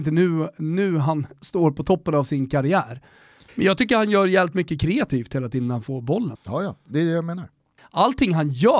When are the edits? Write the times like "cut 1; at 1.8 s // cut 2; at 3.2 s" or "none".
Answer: cut 1; at 3.5 s // cut 2; at 6.4 s // cut 3; at 7.8 s